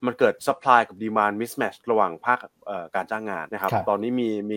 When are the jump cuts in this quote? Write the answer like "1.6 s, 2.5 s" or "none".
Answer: 3.5 s